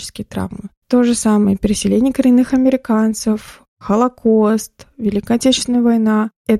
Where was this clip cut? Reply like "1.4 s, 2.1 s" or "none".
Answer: none